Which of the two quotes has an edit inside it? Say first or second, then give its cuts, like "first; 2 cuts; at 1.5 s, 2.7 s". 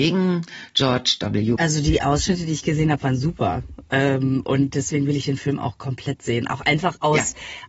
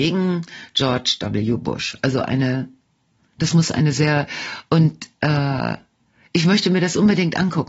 first; 1 cut; at 1.6 s